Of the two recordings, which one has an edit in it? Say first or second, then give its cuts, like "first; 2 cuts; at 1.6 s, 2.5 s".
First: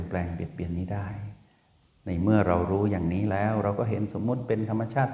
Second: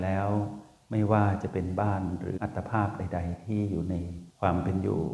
second; 1 cut; at 2.4 s